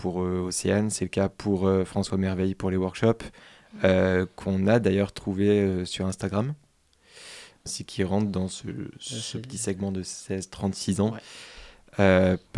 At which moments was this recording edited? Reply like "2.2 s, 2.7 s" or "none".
7.7 s, 9.0 s